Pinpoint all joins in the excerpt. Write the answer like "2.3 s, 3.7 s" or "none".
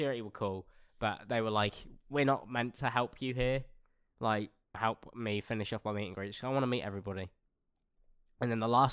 4.7 s